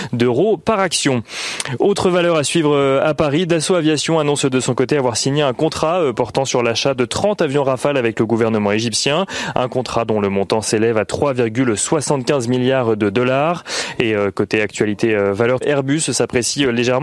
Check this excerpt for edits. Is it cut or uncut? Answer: cut